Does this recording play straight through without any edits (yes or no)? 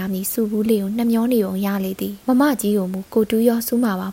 no